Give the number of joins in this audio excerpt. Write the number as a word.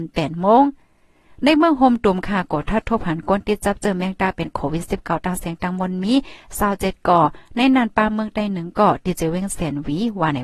zero